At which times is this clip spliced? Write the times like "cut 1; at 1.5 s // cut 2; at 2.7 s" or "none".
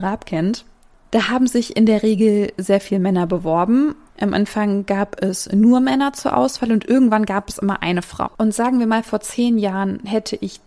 cut 1; at 8.3 s